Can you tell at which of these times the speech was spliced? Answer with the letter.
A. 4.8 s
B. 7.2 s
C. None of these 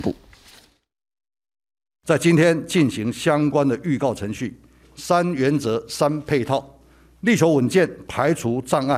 A